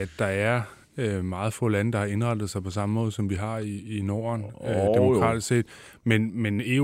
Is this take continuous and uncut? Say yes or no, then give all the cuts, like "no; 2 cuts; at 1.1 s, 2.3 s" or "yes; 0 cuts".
yes; 0 cuts